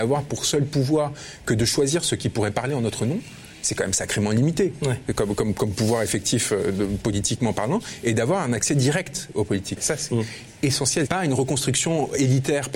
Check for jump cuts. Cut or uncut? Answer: cut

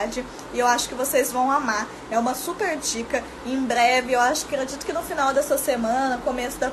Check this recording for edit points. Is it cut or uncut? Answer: uncut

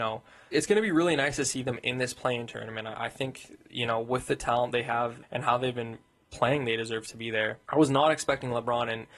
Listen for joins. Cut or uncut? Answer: cut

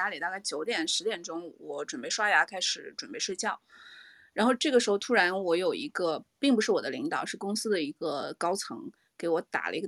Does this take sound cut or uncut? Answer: uncut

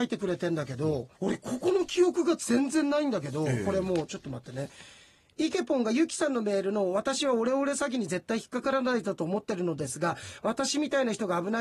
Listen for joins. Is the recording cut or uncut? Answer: cut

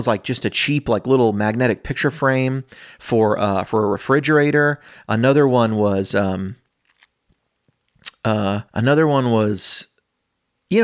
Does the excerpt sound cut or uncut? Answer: cut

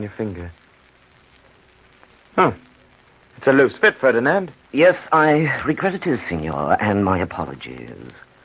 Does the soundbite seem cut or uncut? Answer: uncut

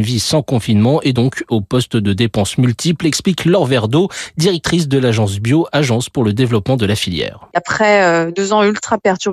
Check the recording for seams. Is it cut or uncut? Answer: uncut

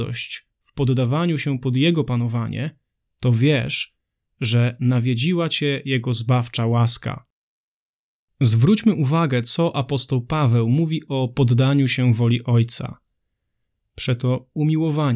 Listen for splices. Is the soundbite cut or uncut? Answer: uncut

